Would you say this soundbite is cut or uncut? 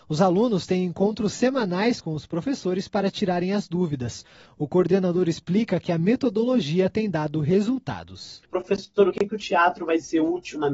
uncut